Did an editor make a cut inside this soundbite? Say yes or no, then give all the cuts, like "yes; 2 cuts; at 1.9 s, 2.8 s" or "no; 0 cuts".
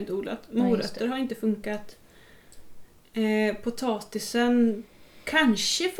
no; 0 cuts